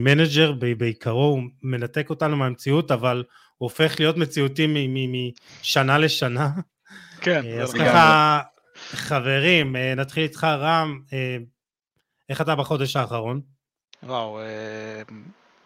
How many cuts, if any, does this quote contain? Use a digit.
0